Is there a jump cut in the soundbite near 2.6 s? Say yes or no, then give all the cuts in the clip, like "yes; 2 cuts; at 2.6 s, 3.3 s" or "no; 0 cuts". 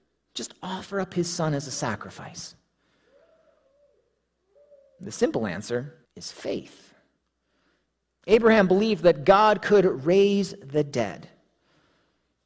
no; 1 cut; at 6.0 s